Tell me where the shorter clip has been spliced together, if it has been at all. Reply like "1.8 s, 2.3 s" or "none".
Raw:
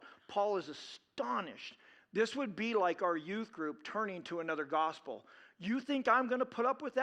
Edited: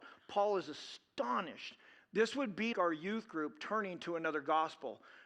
2.7 s